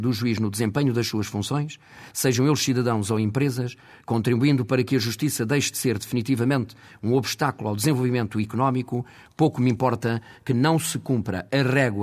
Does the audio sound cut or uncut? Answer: cut